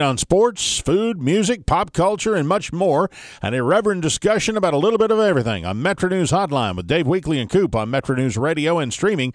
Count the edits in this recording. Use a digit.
0